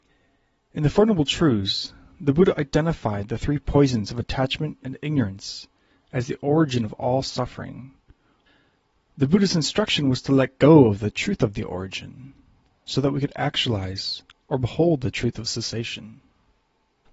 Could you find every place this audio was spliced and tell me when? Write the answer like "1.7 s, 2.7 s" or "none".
4.8 s